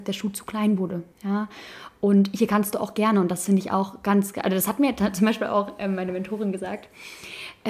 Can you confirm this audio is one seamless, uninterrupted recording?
no; 1 cut; at 1.1 s

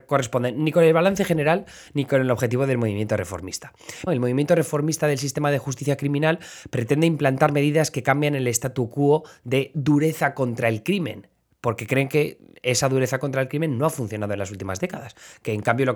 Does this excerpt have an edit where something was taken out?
yes; 1 cut; at 4.1 s

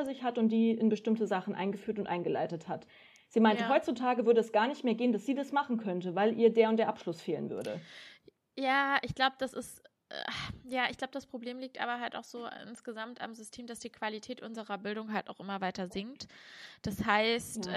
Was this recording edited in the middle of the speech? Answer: no; 0 cuts

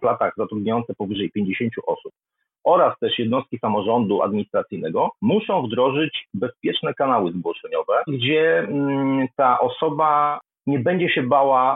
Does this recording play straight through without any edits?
no; 2 cuts; at 5.2 s, 8.1 s

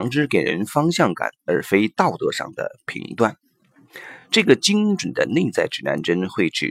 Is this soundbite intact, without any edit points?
yes; 0 cuts

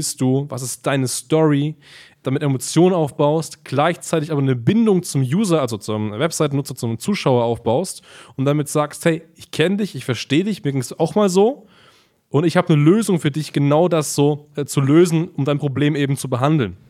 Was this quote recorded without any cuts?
yes; 0 cuts

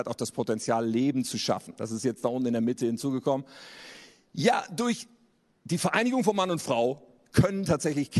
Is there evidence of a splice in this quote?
no; 0 cuts

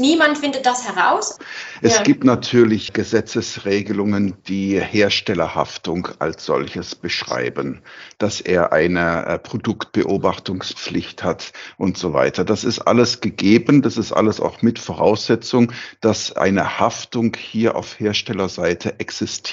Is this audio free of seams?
yes; 0 cuts

